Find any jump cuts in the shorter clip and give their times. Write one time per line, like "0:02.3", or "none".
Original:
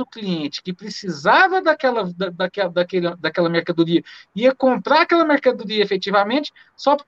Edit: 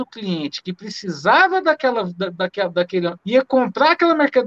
0:03.2